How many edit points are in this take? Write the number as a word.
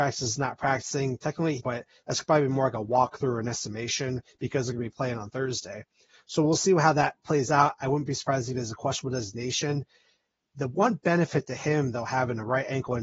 one